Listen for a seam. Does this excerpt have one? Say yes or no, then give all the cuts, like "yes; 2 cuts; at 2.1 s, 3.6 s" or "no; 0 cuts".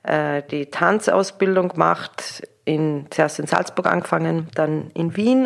no; 0 cuts